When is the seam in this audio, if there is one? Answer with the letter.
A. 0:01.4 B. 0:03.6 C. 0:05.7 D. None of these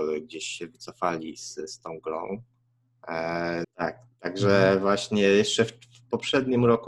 B